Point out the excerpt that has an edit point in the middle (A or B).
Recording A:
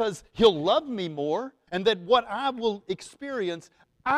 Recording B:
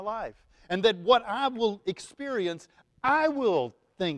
A